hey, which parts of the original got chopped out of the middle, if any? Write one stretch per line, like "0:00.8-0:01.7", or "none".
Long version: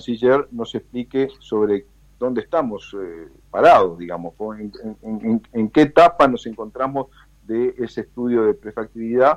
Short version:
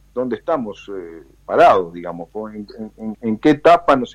0:05.2-0:05.5